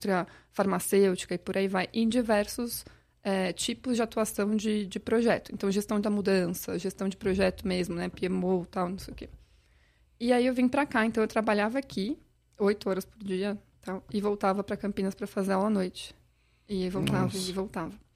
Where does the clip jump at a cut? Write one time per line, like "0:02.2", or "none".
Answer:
none